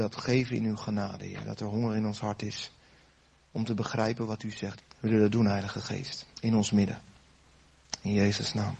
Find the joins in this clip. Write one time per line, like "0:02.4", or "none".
0:04.8
0:06.3